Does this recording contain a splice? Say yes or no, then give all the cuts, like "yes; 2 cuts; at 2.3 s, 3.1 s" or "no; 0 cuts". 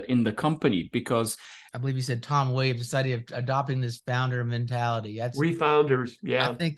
yes; 1 cut; at 1.7 s